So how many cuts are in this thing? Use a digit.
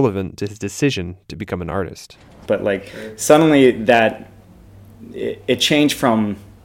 1